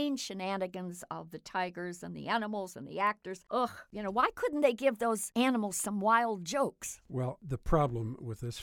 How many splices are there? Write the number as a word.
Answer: zero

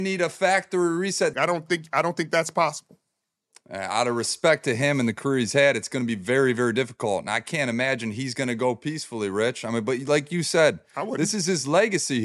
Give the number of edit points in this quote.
one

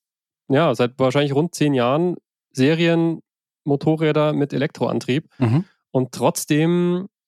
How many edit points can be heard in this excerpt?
zero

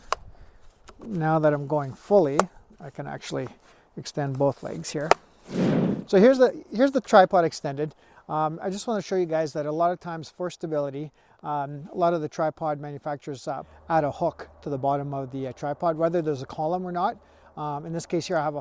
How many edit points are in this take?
zero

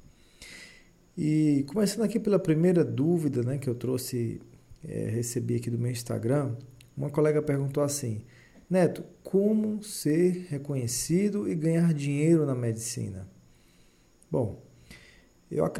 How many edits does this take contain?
zero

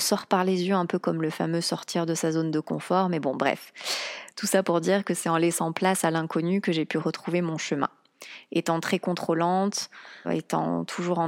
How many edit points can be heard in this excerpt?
two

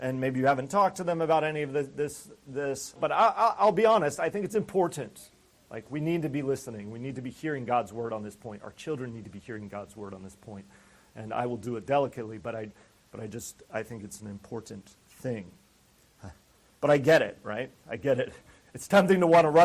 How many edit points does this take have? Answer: one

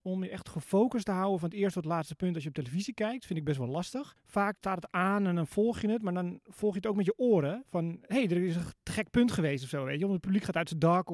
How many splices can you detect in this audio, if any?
zero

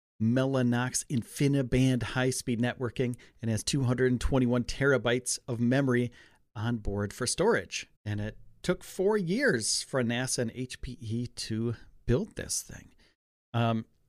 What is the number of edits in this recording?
one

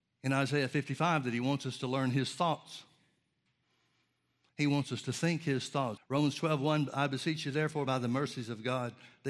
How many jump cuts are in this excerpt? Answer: two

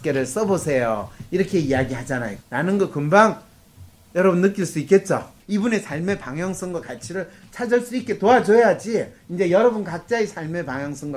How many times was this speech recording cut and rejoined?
two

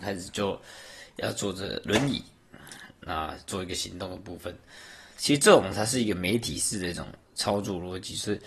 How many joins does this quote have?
one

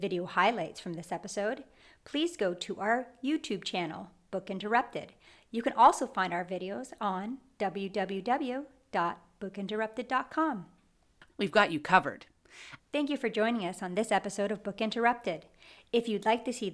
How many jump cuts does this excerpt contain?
two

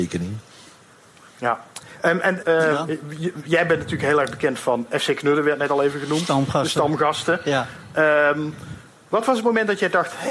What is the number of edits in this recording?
one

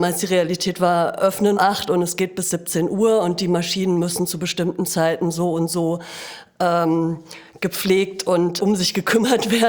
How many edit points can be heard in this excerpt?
two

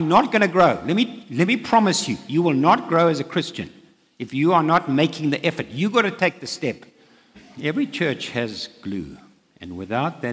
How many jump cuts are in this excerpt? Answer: one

